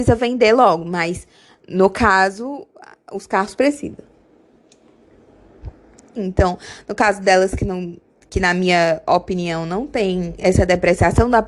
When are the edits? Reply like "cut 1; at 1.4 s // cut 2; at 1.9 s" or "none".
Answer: cut 1; at 6.2 s

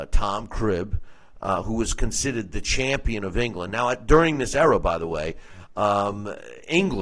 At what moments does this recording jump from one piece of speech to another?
none

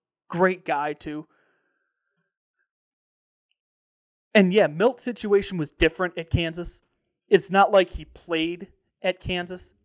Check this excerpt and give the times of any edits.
none

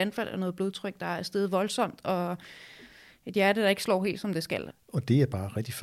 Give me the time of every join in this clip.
cut 1; at 4.7 s

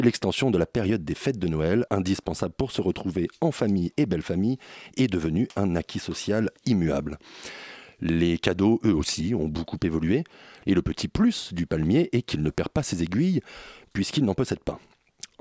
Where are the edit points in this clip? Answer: cut 1; at 1.9 s // cut 2; at 10.6 s

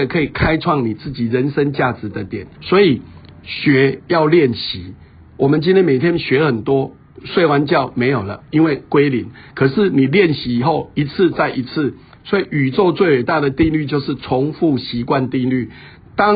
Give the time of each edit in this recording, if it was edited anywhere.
cut 1; at 2.5 s

